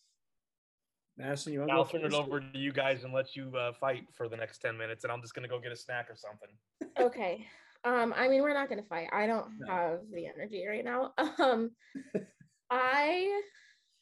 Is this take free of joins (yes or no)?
yes